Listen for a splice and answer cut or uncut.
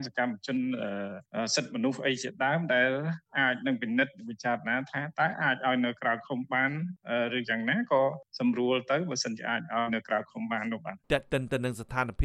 cut